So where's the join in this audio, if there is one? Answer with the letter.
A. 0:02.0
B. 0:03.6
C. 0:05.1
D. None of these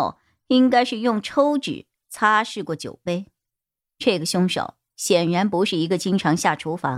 D